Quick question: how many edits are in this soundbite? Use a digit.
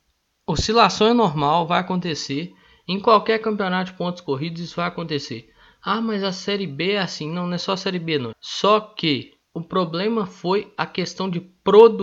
2